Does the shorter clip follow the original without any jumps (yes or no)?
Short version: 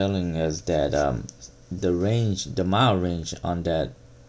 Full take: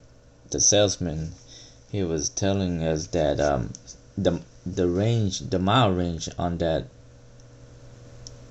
no